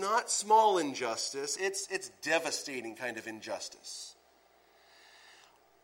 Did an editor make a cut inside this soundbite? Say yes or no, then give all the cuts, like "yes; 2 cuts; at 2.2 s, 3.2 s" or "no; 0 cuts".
yes; 1 cut; at 1.6 s